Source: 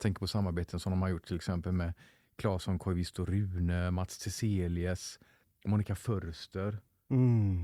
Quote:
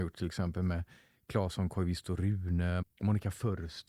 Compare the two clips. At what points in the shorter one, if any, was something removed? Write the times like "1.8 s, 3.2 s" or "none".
2.8 s

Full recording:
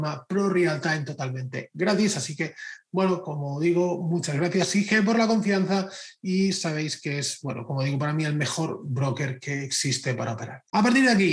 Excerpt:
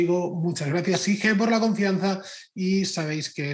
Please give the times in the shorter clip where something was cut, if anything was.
none

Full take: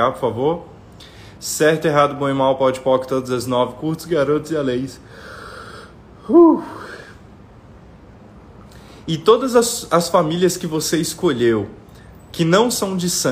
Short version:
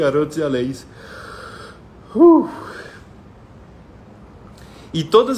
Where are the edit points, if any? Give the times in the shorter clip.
none

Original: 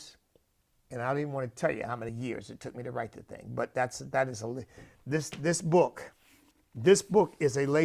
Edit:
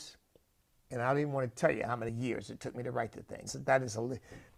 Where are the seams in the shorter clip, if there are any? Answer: 3.5 s

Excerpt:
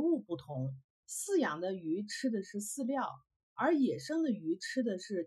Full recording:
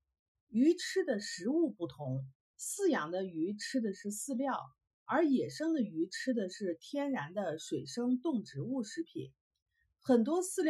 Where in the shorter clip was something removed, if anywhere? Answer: none

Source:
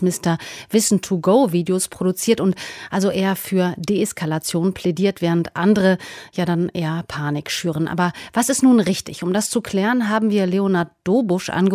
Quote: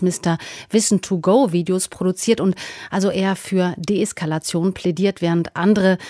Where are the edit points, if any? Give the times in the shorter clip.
none

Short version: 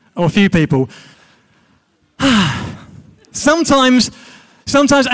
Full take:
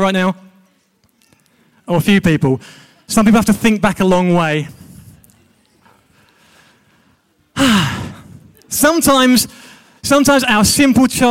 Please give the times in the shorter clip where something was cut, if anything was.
1.1 s

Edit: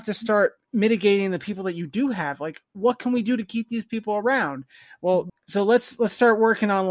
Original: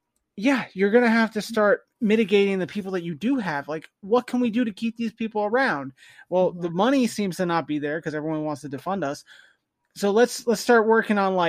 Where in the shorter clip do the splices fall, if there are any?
5.3 s

